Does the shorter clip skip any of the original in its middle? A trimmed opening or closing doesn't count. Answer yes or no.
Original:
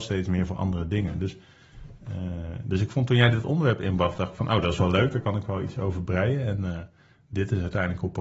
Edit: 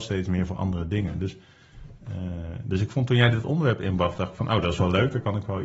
no